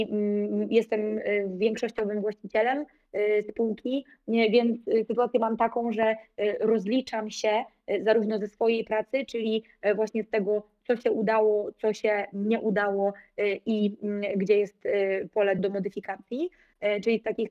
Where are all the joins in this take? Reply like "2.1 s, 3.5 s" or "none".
15.6 s